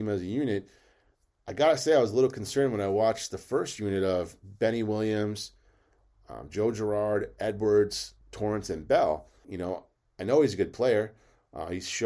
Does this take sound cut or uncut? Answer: cut